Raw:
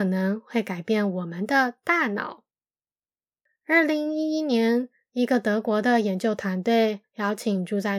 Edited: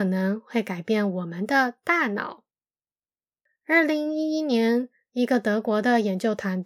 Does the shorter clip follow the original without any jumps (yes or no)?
yes